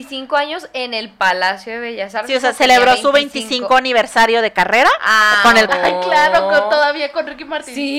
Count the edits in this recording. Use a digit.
1